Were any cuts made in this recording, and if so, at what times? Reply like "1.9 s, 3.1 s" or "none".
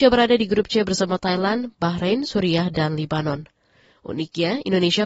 none